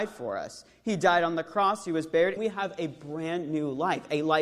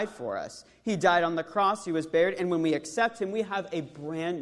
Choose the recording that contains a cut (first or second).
first